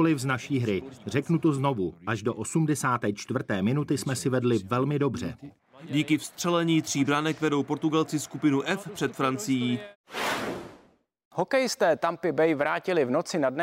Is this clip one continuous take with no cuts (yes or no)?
yes